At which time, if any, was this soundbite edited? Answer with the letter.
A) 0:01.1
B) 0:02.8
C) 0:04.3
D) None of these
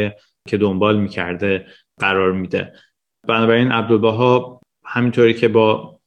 D